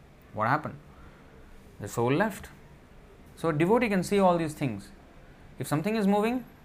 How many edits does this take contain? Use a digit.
1